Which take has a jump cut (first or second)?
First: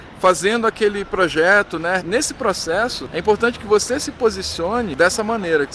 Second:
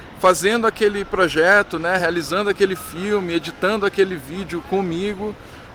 first